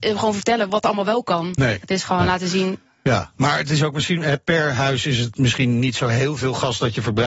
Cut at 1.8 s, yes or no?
yes